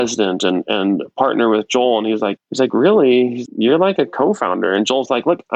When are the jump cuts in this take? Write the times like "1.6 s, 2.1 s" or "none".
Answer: 2.4 s, 3.5 s